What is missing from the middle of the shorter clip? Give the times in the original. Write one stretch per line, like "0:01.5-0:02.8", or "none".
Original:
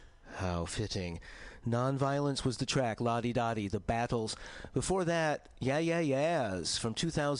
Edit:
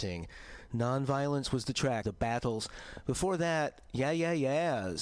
0:03.0-0:03.7